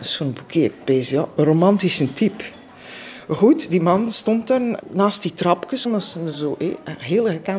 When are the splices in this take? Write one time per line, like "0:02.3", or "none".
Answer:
0:04.8
0:05.9